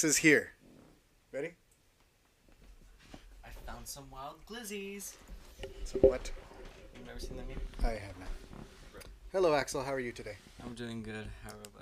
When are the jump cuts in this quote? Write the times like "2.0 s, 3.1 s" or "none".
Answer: none